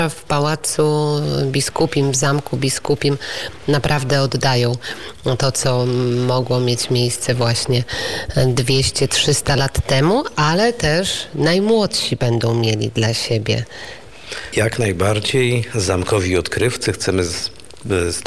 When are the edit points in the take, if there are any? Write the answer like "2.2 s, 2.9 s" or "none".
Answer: 14.5 s